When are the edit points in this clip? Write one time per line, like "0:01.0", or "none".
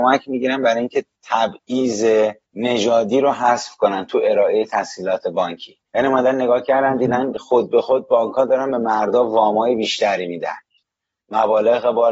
0:02.4
0:05.9